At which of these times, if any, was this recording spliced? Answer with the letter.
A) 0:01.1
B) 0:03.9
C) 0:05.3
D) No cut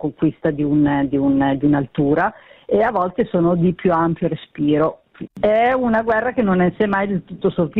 C